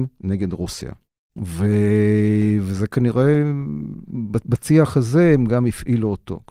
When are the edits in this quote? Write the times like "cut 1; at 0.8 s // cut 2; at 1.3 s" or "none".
cut 1; at 1.4 s